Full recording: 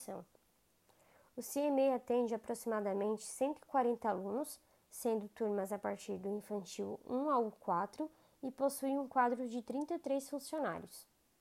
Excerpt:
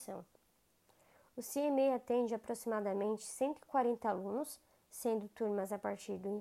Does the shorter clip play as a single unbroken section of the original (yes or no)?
yes